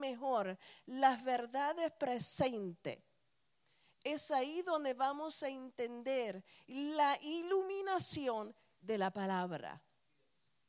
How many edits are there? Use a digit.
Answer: 0